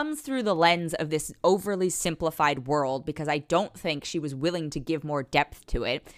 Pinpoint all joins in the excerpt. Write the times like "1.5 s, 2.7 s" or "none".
none